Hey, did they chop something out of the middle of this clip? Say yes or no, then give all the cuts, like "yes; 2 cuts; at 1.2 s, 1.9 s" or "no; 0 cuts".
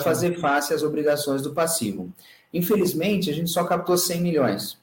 no; 0 cuts